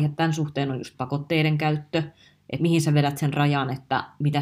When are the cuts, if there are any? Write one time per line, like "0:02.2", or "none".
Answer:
0:02.6